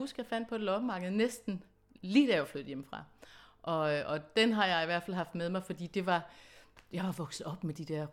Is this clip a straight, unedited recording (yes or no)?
yes